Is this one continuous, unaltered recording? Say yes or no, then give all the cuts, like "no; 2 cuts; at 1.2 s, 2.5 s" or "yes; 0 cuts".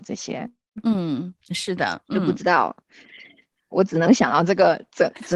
yes; 0 cuts